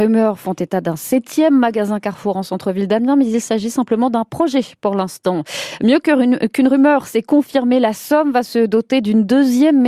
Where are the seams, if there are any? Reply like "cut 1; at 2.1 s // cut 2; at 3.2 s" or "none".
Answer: none